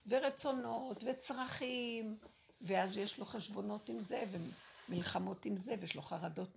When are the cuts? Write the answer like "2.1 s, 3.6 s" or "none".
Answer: none